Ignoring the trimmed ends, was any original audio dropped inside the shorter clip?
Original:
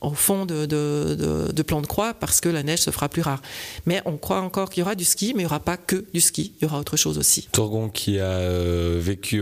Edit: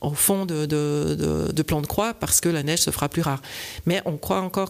no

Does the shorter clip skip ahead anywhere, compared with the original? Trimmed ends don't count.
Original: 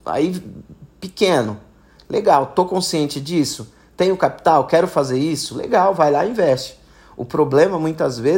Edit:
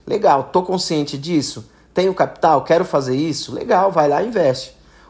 no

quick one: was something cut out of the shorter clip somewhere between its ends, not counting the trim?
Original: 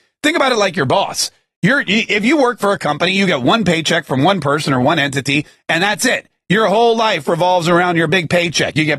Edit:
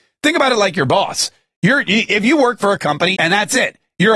yes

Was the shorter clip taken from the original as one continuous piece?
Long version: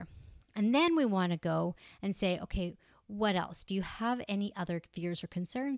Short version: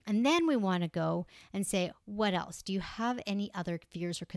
no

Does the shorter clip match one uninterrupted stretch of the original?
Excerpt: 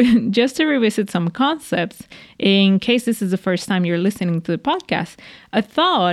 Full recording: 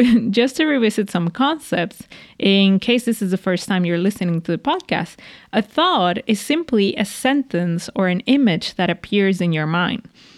yes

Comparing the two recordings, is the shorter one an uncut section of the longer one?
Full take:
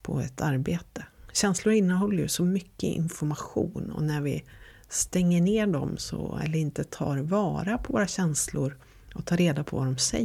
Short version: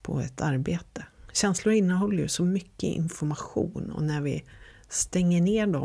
yes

